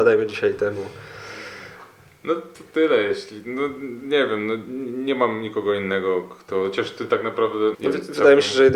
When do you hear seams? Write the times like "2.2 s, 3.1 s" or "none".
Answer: 7.7 s